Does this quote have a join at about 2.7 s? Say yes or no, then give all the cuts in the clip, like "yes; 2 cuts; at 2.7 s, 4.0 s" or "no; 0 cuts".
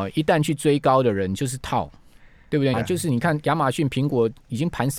yes; 1 cut; at 2.7 s